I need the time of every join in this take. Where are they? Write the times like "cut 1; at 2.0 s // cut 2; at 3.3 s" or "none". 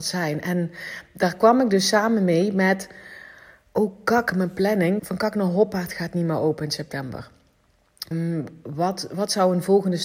cut 1; at 5.0 s // cut 2; at 8.1 s